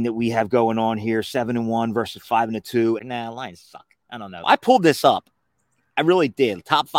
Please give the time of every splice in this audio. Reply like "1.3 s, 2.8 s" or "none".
3.0 s, 4.4 s